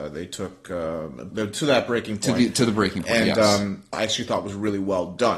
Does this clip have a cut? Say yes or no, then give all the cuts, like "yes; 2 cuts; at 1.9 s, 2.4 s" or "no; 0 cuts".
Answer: yes; 2 cuts; at 1.3 s, 3.9 s